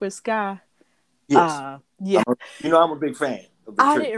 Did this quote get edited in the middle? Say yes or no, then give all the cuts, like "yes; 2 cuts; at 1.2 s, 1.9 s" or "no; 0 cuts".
yes; 1 cut; at 2.2 s